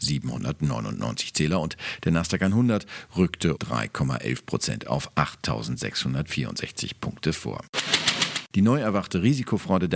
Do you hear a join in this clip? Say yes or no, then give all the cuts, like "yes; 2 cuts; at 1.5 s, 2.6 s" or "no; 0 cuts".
yes; 1 cut; at 3.6 s